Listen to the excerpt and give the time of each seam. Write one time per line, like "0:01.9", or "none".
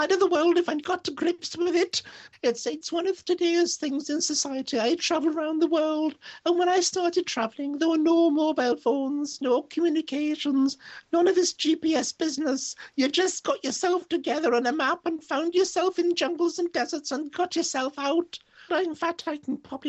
0:02.3
0:18.7